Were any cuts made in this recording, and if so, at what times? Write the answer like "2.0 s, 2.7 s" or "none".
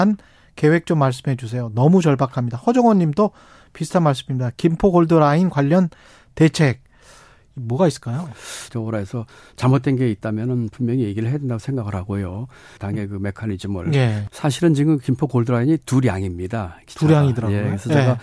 8.7 s, 12.8 s, 14.3 s